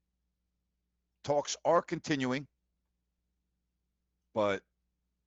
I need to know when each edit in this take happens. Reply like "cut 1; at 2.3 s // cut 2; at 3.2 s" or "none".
cut 1; at 4.2 s